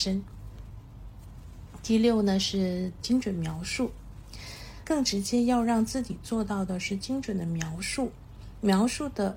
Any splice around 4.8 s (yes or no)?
yes